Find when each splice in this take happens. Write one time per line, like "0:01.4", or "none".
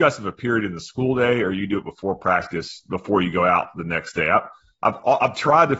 none